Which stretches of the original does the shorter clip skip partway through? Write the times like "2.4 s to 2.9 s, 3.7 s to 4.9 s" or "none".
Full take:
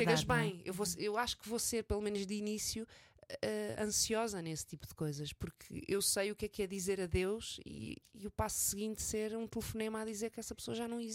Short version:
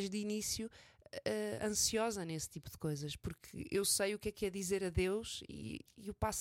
none

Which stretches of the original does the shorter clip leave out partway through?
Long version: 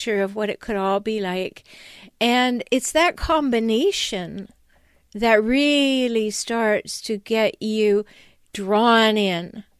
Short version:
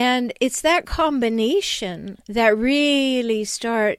4.5 s to 5.1 s

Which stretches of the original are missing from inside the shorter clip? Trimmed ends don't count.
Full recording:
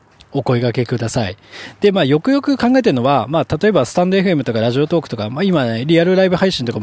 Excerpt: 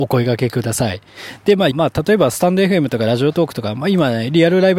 2.1 s to 3.3 s

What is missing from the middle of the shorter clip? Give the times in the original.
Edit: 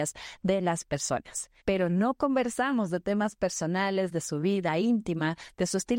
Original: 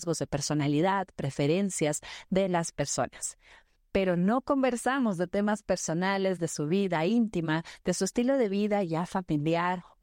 3.5 s to 3.9 s

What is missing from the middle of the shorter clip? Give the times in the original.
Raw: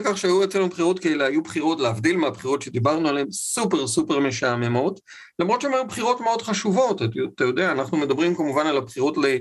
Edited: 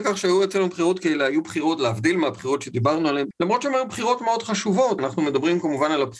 3.3 s to 5.3 s, 7.0 s to 7.7 s

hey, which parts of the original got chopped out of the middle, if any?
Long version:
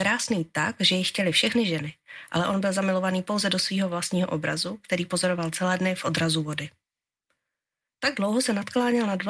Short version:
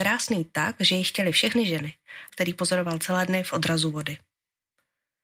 2.3 s to 4.8 s

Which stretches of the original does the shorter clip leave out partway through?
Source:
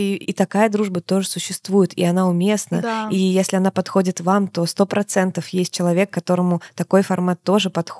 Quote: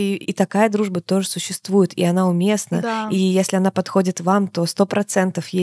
none

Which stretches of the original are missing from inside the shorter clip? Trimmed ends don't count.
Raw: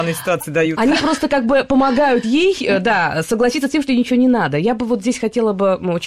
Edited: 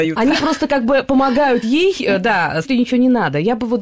3.3 s to 3.8 s

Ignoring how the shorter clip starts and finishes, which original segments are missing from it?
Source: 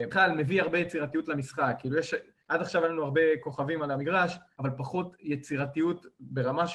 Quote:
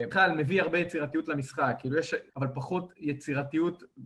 2.3 s to 4.5 s

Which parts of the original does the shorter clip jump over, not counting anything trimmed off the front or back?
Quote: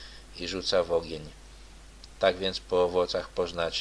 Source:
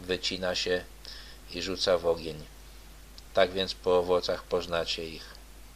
none

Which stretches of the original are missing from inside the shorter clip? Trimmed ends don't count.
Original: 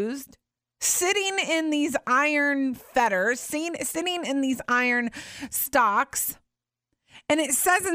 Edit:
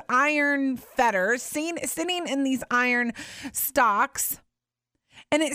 none

